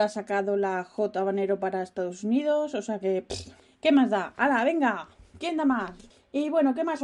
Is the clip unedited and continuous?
yes; 0 cuts

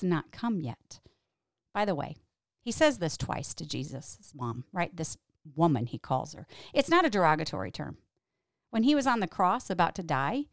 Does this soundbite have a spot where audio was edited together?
no; 0 cuts

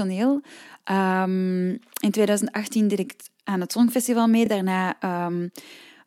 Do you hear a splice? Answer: no; 0 cuts

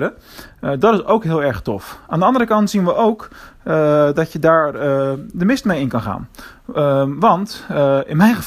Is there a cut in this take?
no; 0 cuts

